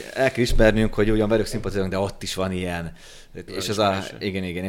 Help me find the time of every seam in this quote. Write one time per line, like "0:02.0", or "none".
0:03.5